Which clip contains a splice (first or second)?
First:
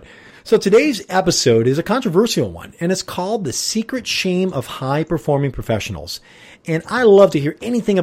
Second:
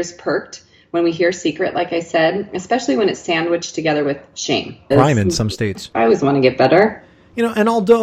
second